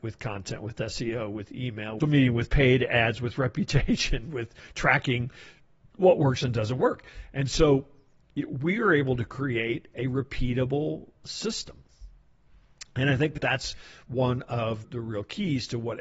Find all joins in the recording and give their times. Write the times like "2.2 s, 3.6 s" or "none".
2.0 s